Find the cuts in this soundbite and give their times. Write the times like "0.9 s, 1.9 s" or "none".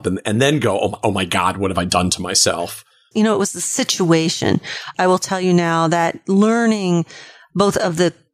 3.1 s, 4.9 s